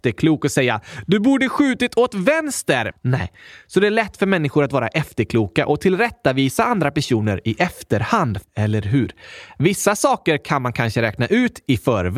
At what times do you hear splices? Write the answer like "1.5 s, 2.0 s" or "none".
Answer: 2.9 s, 8.4 s